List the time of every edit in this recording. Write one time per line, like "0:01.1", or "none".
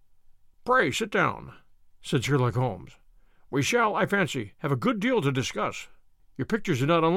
0:06.2